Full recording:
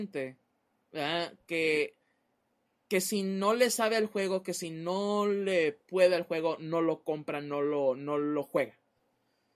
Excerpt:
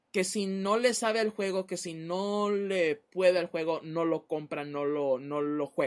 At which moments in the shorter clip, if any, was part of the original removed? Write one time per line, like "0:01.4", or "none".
none

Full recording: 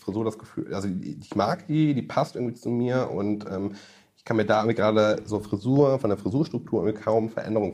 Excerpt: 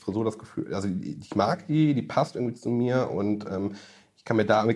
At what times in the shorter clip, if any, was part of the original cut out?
none

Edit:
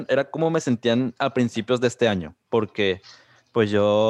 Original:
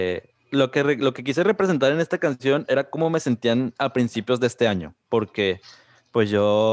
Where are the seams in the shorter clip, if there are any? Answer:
none

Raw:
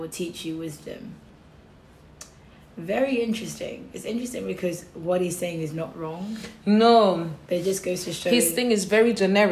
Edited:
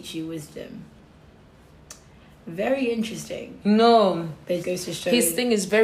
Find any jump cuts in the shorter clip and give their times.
0:03.6
0:04.6

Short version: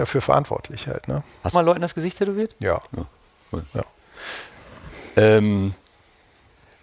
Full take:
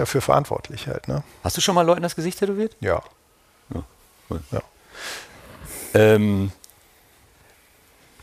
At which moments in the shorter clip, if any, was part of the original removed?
0:01.5
0:02.9

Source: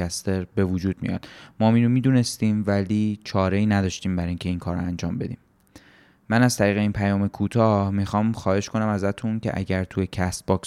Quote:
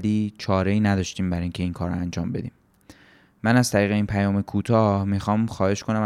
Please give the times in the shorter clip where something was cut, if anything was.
none

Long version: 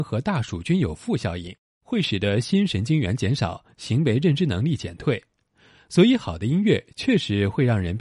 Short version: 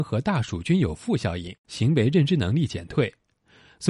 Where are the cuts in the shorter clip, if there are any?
0:01.6

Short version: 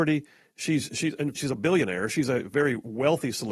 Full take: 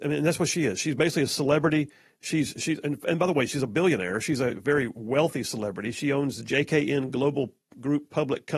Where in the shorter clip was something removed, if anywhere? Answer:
0:01.3

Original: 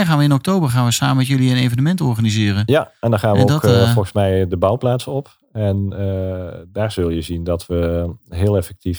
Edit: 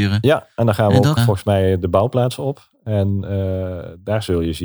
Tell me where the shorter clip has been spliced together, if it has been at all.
0:01.2

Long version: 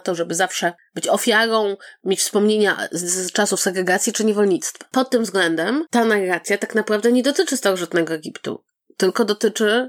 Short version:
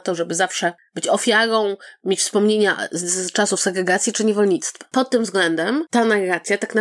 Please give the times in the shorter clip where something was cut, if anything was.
none

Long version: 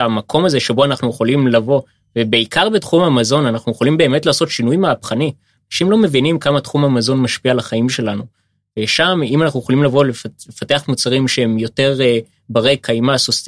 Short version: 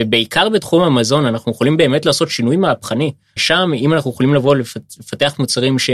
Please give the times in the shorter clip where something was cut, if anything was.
0:03.4

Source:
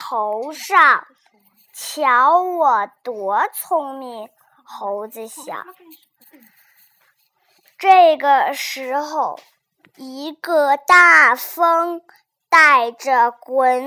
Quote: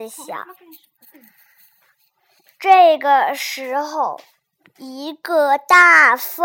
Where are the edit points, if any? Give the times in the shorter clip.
none

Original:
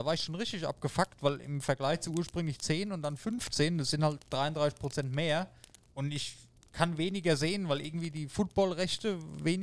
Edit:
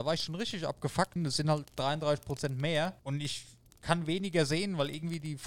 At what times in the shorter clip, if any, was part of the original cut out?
0:01.2
0:03.0

